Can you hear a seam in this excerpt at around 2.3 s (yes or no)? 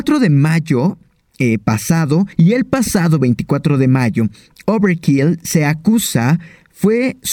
yes